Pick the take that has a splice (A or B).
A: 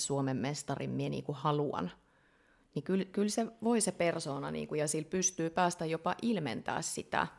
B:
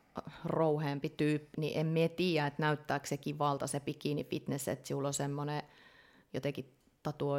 B